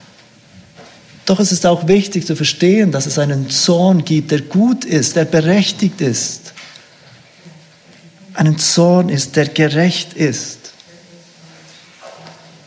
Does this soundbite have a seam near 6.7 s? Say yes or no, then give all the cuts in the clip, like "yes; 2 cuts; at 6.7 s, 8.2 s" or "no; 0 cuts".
no; 1 cut; at 5.1 s